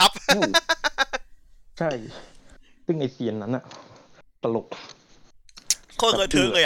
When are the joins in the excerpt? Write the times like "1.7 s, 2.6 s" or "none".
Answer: none